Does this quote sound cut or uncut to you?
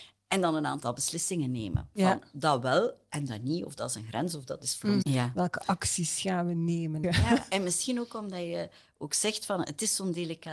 cut